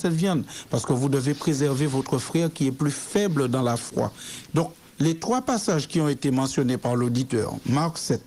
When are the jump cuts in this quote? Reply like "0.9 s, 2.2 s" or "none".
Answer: 4.5 s